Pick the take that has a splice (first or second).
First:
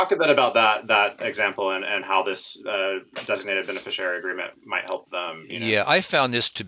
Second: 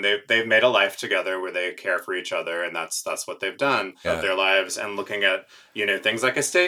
second